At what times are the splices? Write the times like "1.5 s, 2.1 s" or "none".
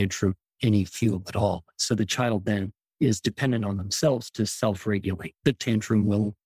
none